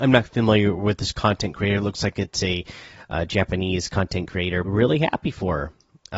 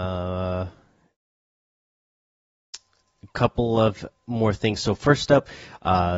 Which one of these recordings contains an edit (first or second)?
first